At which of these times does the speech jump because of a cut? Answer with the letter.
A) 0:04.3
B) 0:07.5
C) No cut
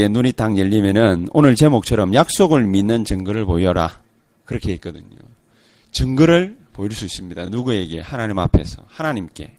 C